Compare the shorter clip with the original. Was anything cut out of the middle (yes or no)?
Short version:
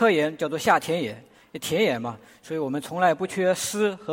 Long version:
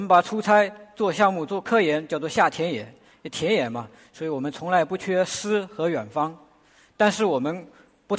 no